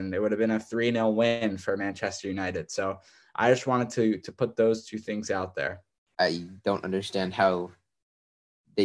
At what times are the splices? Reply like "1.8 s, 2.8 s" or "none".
6.1 s